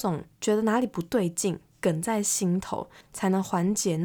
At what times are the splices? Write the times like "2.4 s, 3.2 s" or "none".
3.0 s